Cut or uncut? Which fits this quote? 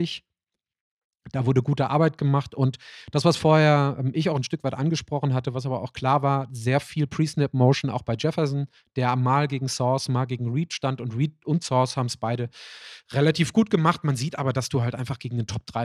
uncut